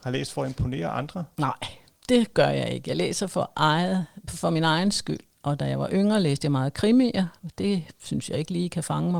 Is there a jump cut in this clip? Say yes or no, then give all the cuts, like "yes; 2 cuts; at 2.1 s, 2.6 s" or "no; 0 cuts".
no; 0 cuts